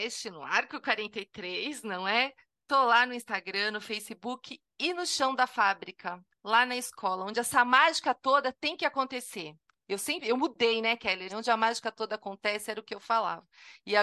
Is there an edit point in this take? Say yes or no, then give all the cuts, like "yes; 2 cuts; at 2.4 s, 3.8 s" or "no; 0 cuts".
yes; 1 cut; at 11.3 s